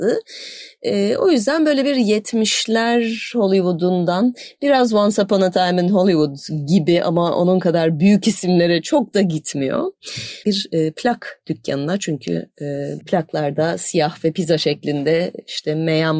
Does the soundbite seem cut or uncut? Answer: cut